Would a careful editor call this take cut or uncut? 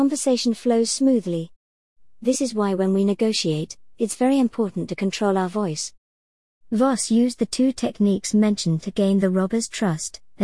uncut